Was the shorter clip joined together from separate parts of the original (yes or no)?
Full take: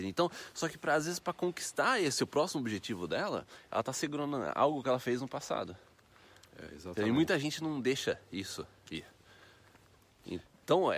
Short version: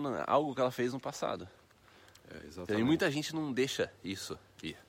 no